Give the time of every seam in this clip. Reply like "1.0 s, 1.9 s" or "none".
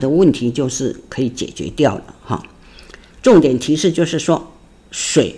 3.1 s